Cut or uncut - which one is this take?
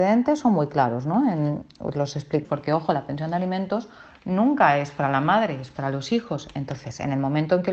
cut